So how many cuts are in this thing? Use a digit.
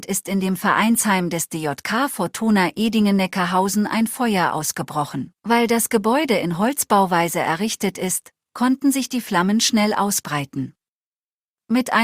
1